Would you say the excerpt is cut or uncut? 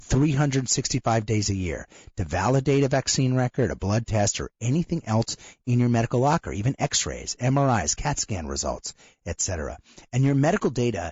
uncut